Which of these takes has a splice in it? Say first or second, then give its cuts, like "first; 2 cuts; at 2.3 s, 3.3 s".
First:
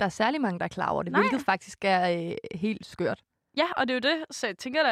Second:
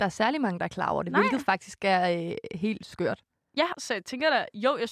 second; 1 cut; at 3.7 s